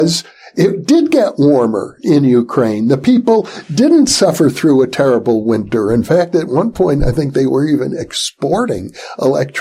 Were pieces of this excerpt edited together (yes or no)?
no